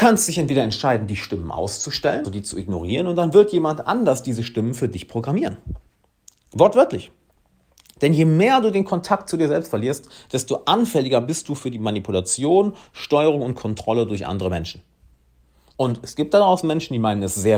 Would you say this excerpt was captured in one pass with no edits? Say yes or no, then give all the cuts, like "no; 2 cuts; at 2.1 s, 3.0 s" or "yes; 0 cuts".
no; 1 cut; at 2.2 s